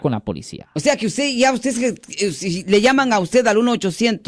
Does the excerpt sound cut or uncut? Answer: uncut